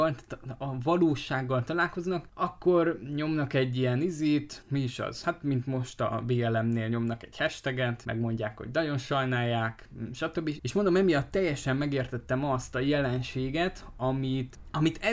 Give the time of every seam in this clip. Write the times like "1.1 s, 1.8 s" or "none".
10.6 s

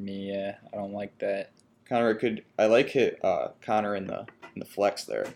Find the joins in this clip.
none

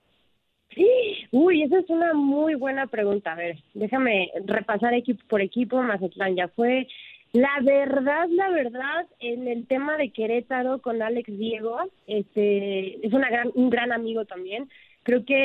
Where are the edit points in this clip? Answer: none

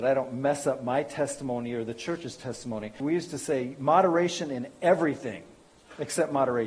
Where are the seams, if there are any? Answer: 3.0 s

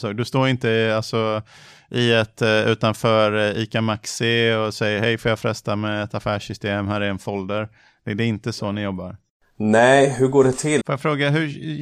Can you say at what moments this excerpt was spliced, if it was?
10.8 s

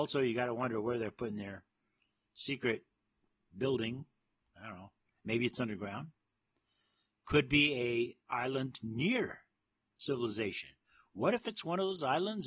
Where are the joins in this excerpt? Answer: none

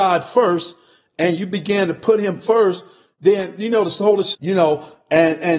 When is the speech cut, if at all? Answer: 4.3 s

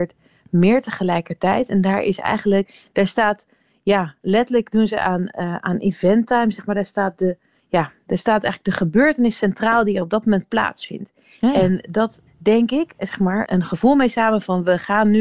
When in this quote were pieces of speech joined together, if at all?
12.3 s, 13.5 s

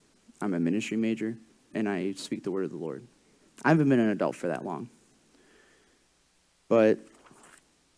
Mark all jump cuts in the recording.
1.7 s, 3.5 s

